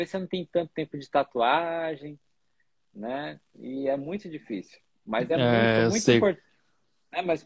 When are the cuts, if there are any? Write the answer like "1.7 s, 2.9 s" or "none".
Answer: none

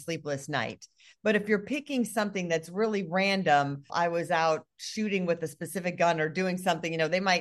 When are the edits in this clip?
3.9 s

